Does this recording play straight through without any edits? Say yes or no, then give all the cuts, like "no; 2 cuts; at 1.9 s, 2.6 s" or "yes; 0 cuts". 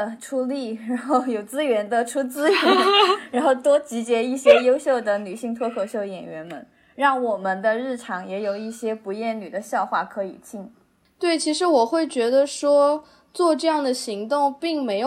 yes; 0 cuts